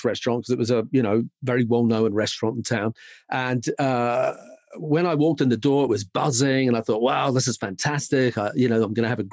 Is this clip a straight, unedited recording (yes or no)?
yes